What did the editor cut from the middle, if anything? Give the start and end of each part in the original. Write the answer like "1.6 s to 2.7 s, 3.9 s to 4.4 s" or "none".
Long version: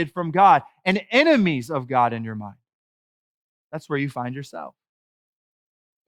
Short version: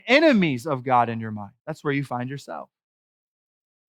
2.6 s to 3.6 s